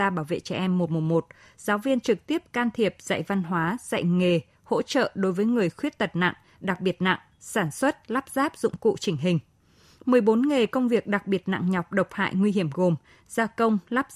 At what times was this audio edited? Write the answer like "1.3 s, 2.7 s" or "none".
none